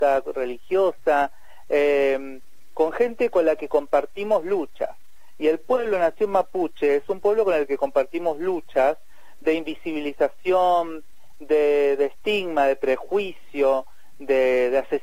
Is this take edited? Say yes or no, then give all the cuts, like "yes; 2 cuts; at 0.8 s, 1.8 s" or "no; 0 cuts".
no; 0 cuts